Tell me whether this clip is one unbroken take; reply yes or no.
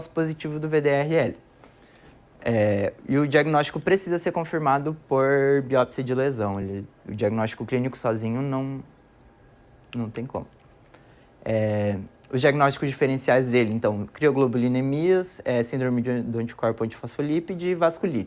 yes